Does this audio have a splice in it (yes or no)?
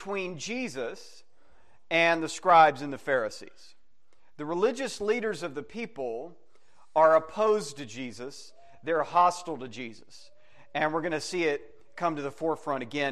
no